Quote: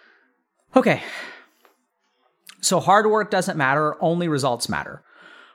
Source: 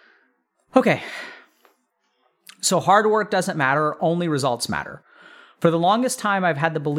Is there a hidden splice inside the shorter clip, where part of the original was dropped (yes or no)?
no